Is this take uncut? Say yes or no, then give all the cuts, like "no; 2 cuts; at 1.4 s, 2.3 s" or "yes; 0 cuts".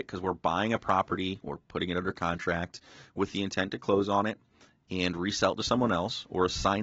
yes; 0 cuts